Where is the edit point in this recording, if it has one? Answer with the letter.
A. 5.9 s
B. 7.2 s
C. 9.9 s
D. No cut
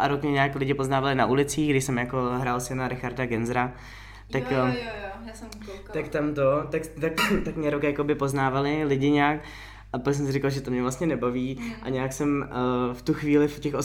B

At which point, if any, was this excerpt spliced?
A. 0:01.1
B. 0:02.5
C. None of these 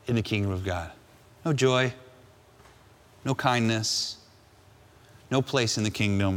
C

